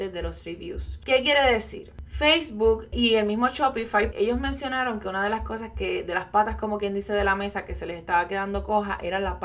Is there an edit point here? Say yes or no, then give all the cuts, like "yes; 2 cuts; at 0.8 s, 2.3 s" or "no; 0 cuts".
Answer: yes; 2 cuts; at 1.0 s, 4.1 s